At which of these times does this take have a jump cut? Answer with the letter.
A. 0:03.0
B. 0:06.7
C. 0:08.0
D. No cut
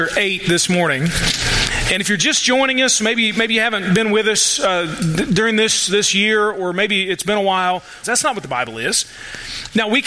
C